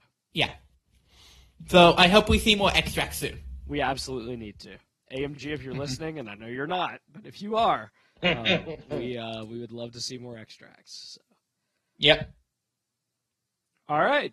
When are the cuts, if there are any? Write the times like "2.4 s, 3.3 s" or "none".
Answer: none